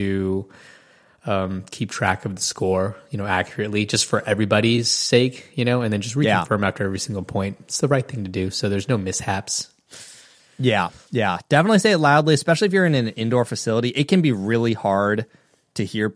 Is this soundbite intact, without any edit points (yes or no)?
yes